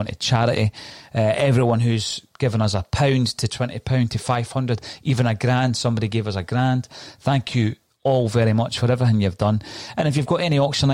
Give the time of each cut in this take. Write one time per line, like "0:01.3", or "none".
none